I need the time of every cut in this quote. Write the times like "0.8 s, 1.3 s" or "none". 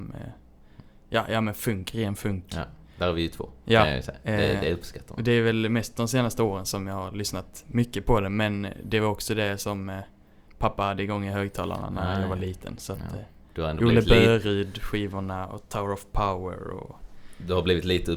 none